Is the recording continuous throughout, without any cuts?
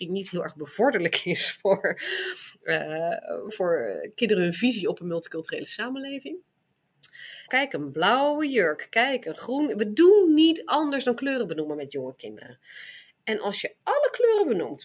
no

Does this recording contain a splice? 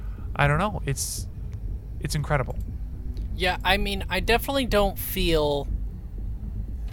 no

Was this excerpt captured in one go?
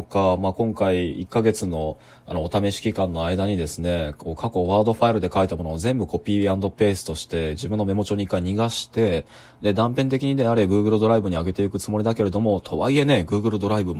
yes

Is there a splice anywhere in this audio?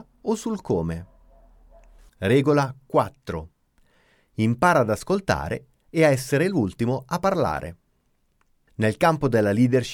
no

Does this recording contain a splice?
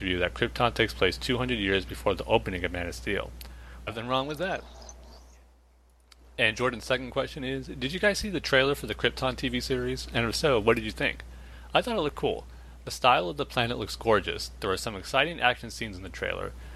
yes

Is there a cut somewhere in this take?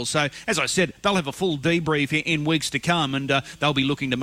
no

